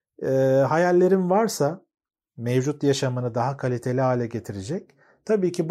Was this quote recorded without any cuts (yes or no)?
yes